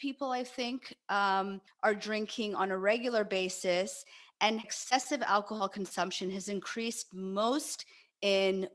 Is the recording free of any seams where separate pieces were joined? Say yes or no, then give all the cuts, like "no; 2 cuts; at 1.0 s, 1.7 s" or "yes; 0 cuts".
yes; 0 cuts